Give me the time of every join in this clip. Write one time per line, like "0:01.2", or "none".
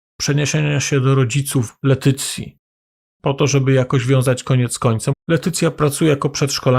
0:05.1